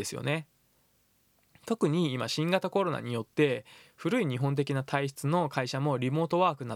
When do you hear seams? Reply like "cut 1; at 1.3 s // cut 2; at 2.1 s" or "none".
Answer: none